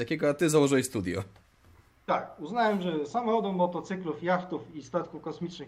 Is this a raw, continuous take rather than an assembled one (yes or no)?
yes